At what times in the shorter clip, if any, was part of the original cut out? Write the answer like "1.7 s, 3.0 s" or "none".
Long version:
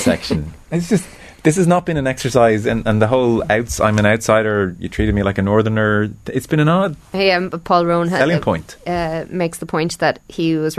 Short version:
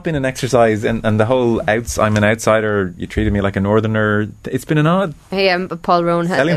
none

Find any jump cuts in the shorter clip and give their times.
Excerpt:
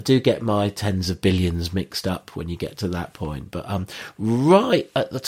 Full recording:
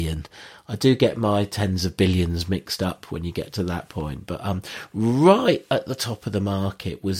none

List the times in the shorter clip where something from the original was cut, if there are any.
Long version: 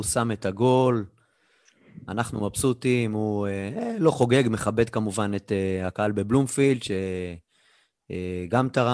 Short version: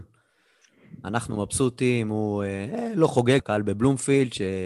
3.4 s

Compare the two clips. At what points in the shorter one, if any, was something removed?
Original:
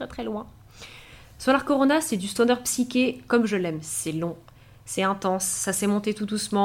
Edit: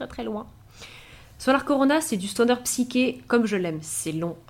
none

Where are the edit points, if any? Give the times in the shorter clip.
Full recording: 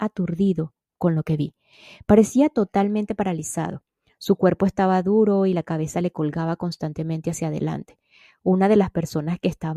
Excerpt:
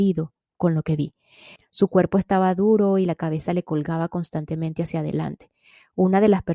1.6 s

